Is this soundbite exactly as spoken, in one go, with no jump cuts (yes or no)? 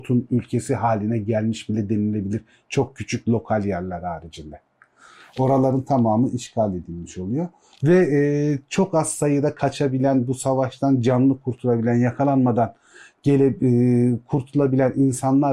yes